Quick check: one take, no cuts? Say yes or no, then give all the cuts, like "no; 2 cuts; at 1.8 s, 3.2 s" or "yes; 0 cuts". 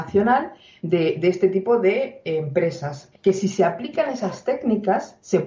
no; 1 cut; at 3.1 s